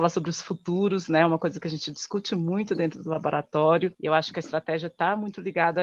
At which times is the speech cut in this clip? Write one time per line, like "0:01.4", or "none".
0:03.9